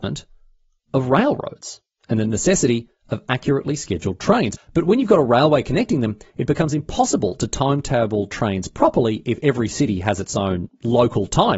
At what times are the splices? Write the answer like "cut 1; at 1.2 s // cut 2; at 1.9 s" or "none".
cut 1; at 4.6 s // cut 2; at 10.7 s